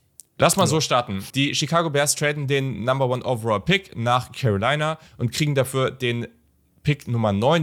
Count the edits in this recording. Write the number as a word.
two